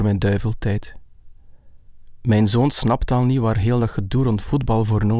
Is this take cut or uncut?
uncut